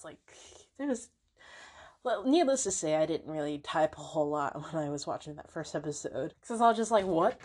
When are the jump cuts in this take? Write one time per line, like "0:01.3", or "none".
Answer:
0:06.3